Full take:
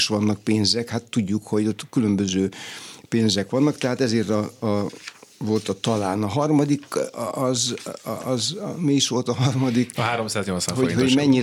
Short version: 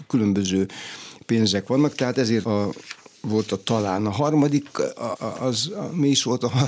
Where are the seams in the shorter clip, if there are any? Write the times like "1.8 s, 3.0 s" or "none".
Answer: 2.4 s, 5.1 s